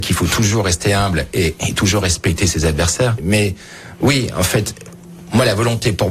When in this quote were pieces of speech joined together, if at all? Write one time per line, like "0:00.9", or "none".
none